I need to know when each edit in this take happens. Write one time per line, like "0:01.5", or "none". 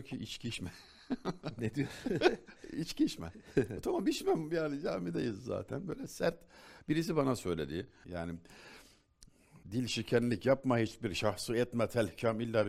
0:08.0
0:09.6